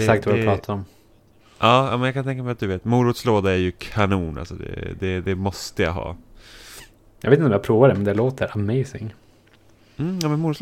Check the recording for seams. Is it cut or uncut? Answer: uncut